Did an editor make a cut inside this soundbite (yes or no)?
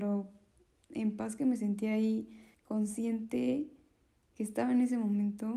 yes